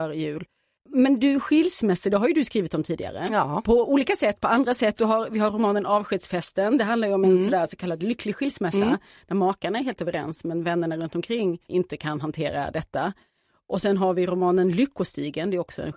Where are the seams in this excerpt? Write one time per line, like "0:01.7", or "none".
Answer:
none